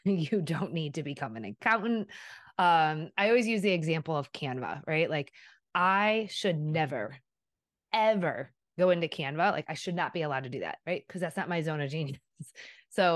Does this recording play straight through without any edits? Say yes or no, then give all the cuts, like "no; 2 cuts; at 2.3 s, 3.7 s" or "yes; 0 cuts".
yes; 0 cuts